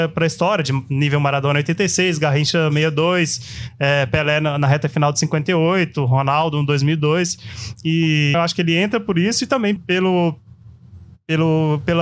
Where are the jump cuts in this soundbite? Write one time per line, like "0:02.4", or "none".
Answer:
0:08.3
0:09.8